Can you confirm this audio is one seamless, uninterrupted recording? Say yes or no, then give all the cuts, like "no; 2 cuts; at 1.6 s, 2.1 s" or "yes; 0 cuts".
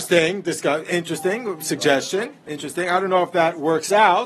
yes; 0 cuts